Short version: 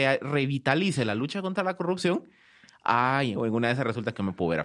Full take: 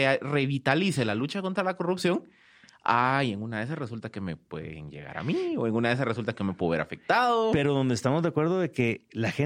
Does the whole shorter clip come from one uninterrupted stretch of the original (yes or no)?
no